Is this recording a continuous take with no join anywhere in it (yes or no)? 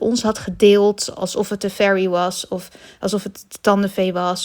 yes